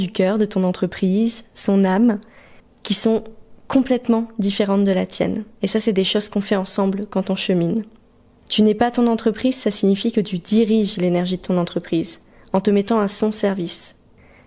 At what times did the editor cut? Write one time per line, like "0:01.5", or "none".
none